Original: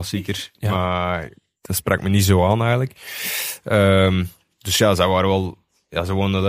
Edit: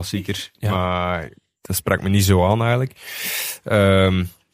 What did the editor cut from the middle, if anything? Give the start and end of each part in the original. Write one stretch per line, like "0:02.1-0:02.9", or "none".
none